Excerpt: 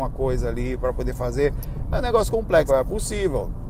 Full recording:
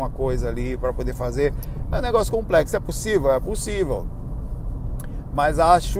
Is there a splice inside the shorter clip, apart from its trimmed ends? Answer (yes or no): yes